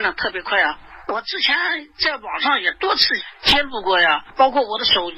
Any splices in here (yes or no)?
no